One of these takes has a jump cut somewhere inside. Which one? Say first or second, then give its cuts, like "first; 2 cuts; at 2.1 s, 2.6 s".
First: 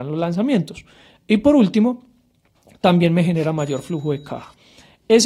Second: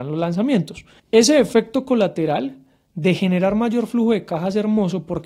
second; 1 cut; at 1.0 s